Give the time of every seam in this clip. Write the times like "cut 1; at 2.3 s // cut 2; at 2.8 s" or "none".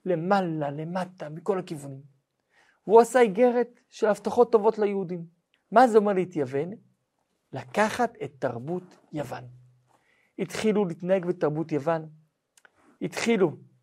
cut 1; at 5.5 s